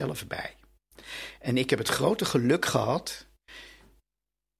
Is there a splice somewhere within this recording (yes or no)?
no